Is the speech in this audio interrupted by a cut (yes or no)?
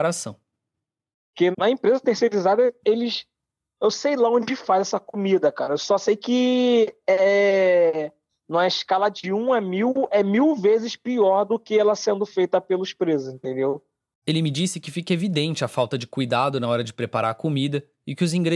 yes